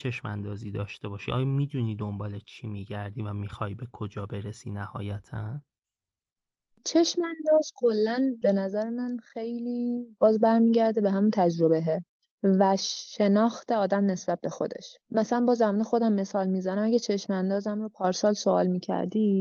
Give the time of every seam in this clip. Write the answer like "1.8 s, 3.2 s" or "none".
15.0 s